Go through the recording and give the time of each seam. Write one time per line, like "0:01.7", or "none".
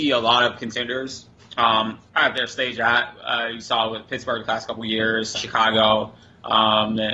0:02.1
0:05.3